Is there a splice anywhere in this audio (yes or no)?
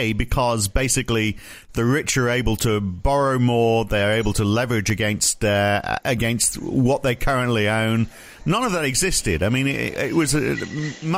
no